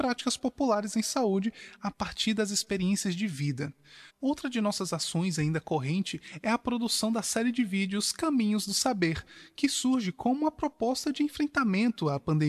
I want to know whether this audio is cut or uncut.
cut